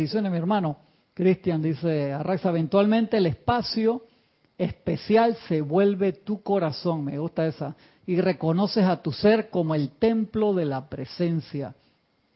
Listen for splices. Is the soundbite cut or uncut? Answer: uncut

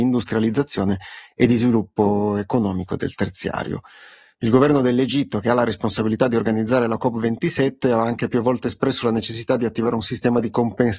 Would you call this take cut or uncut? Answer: uncut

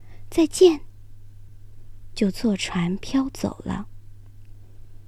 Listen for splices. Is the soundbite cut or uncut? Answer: uncut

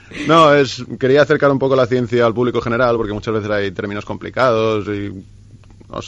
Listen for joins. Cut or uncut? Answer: uncut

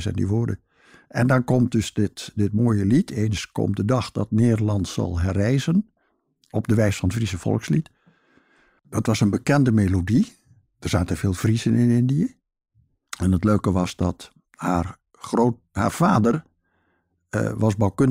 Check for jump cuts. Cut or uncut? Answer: cut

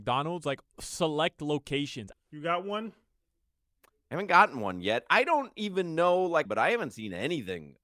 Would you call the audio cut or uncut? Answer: cut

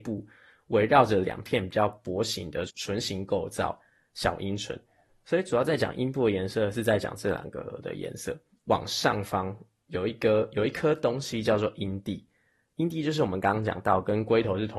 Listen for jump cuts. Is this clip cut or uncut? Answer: cut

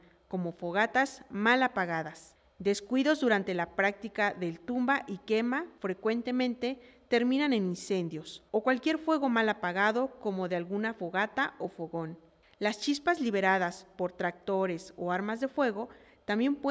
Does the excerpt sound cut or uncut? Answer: uncut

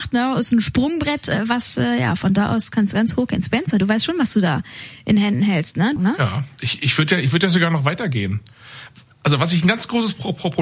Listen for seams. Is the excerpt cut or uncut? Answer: cut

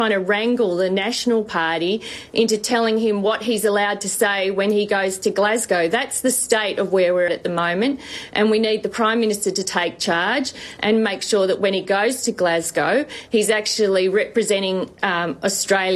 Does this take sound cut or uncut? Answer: cut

